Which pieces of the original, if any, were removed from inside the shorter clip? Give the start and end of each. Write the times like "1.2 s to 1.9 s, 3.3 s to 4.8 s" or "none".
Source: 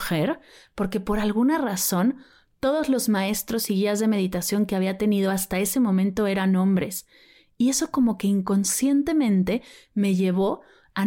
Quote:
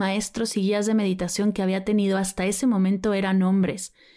none